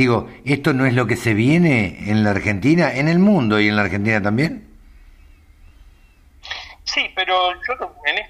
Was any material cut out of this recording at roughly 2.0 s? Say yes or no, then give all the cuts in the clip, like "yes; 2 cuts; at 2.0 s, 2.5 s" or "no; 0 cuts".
yes; 1 cut; at 2.0 s